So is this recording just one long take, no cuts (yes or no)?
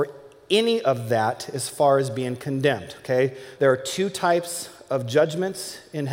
no